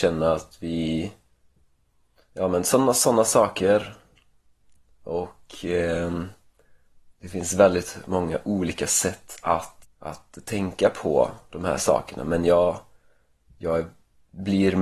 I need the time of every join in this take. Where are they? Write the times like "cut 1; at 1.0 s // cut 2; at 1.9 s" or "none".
cut 1; at 9.8 s